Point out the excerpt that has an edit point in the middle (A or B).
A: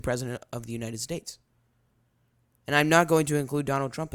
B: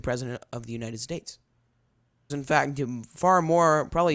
B